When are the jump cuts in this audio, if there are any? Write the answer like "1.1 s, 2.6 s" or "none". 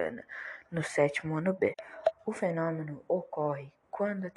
2.1 s